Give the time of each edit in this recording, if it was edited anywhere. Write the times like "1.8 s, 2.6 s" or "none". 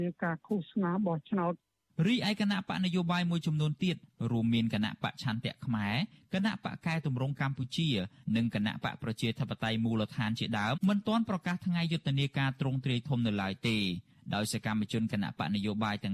10.7 s